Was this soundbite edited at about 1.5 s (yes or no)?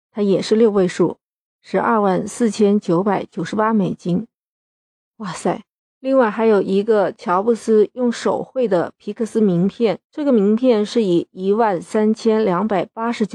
no